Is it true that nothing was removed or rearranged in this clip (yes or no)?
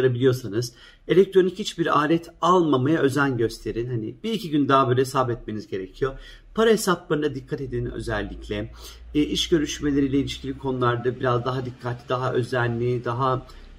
yes